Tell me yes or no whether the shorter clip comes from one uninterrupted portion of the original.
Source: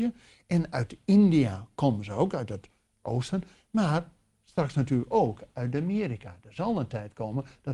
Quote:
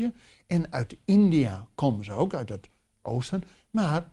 yes